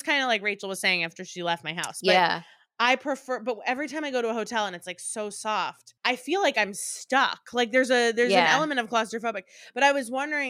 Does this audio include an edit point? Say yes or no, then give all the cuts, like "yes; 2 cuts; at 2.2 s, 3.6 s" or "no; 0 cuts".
yes; 1 cut; at 6.0 s